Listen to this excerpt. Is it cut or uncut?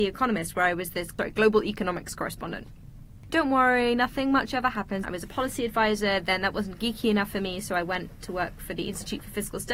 cut